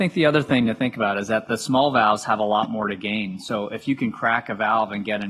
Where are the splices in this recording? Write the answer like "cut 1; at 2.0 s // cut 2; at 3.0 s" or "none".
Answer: none